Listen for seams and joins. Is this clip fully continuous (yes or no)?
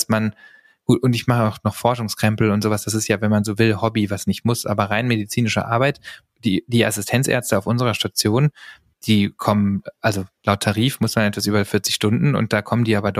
yes